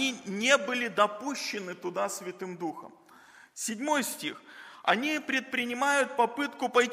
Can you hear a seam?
no; 0 cuts

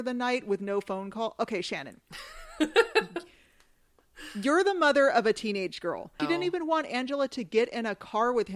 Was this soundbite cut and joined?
yes; 1 cut; at 6.2 s

